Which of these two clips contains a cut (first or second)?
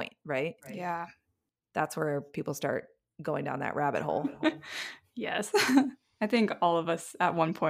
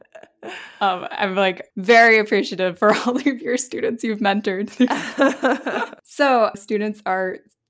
second